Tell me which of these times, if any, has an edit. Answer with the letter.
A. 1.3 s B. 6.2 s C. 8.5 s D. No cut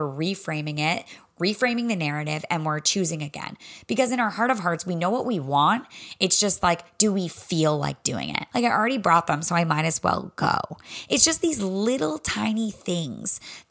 C